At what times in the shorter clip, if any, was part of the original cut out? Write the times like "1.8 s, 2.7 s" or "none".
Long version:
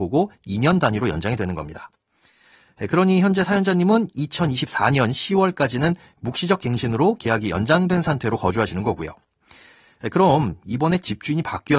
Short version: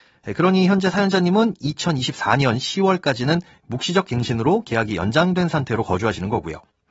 none